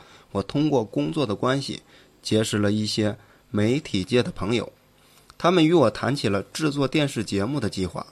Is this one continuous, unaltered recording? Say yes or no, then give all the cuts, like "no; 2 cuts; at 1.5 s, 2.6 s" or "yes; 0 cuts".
yes; 0 cuts